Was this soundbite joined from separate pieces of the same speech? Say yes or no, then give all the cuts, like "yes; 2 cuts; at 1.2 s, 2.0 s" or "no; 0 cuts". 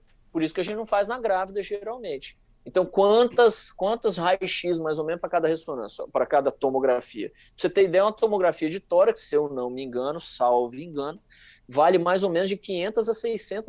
no; 0 cuts